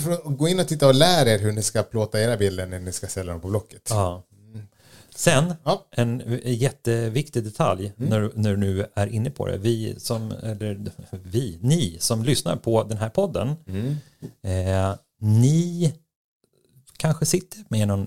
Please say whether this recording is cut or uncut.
uncut